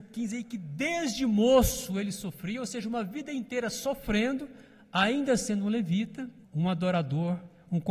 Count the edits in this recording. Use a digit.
1